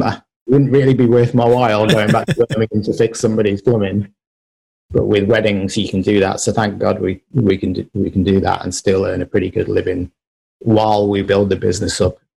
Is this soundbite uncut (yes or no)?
yes